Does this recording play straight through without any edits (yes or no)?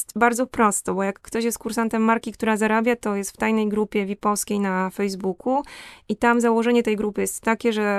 yes